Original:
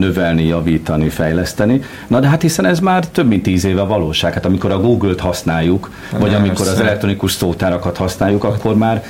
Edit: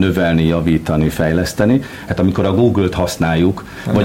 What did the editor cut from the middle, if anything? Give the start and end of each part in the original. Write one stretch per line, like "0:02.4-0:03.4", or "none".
0:02.1-0:04.3